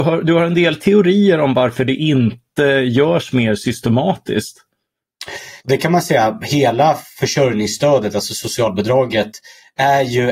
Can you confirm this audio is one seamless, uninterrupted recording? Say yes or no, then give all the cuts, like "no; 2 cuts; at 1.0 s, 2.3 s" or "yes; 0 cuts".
no; 1 cut; at 5.6 s